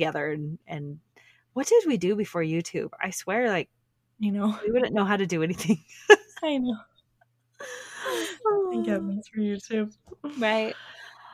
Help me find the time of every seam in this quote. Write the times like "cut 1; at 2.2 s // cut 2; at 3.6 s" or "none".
none